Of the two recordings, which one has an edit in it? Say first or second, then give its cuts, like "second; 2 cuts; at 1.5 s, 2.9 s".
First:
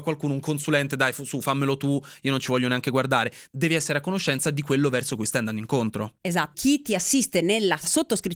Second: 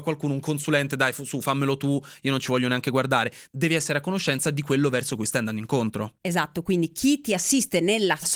first; 1 cut; at 6.5 s